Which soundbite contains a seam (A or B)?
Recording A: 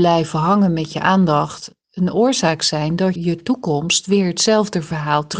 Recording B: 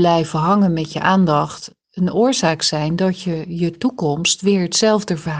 A